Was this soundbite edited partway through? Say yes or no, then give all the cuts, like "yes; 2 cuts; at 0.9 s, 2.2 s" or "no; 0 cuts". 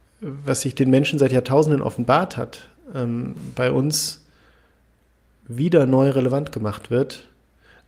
no; 0 cuts